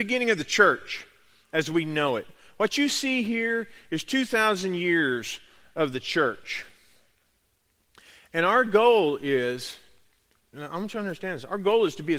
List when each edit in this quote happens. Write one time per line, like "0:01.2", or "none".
none